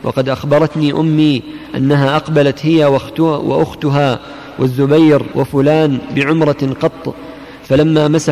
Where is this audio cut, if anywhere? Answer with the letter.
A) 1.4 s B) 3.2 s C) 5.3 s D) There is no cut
C